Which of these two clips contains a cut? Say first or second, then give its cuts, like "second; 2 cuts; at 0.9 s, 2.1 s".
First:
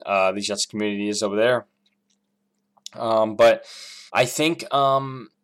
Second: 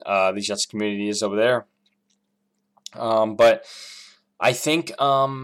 first; 1 cut; at 4.1 s